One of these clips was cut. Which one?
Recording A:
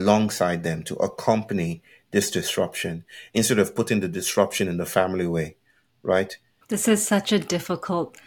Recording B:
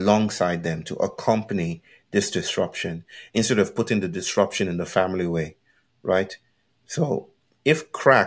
A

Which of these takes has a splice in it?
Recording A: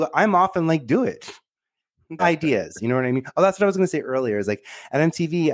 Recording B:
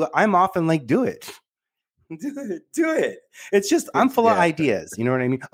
A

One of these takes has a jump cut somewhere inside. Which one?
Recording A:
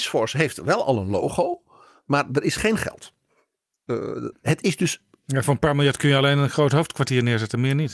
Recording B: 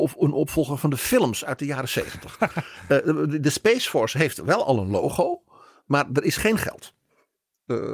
A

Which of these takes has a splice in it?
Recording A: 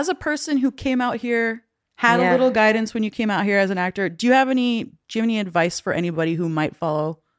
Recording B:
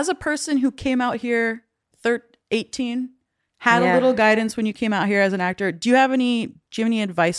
A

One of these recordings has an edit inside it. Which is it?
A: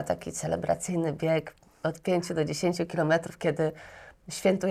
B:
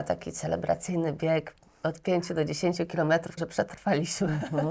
B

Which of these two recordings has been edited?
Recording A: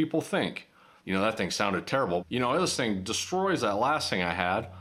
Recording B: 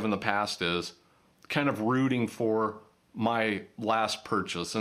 A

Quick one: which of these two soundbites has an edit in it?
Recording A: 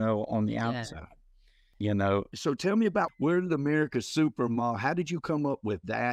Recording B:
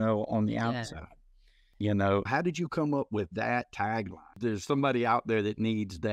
B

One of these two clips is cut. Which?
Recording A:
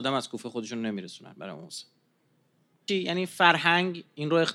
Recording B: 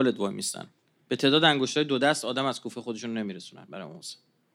A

